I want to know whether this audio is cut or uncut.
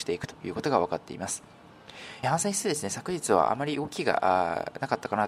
cut